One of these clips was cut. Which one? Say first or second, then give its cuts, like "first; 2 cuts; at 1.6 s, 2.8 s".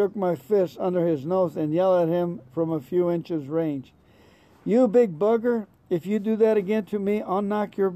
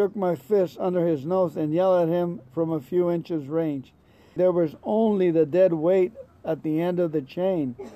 second; 1 cut; at 4.4 s